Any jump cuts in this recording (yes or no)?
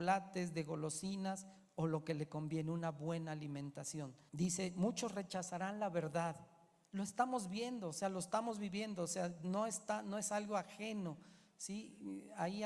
yes